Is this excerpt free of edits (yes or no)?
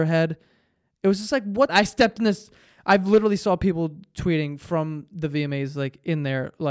no